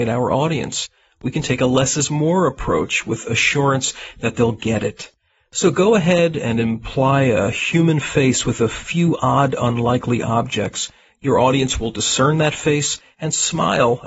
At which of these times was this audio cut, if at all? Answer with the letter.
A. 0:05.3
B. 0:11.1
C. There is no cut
C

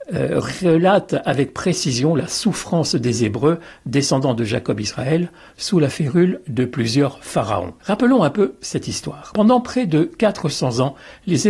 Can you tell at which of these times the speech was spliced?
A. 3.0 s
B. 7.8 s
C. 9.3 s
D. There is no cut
B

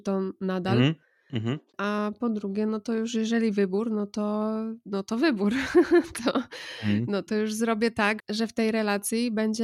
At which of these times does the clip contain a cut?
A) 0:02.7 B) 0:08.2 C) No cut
B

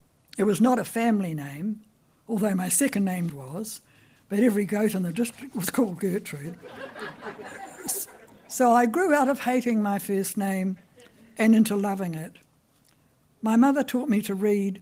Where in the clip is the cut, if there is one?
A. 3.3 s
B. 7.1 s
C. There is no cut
A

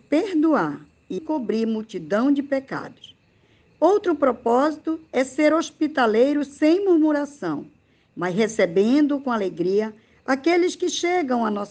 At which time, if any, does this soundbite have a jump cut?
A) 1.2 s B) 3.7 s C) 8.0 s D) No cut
A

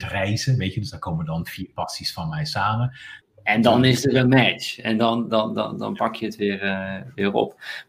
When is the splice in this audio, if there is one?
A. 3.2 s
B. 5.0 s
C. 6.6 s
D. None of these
A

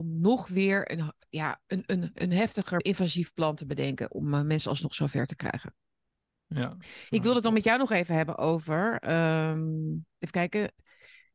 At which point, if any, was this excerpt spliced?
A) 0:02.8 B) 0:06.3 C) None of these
A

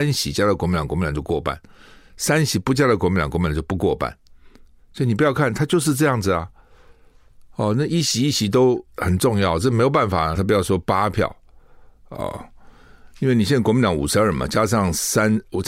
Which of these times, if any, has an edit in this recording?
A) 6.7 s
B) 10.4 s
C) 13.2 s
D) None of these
B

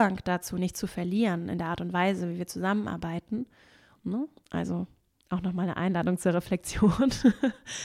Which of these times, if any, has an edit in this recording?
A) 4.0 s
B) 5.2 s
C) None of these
A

